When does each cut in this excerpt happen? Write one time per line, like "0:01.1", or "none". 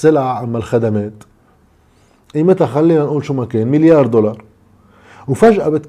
none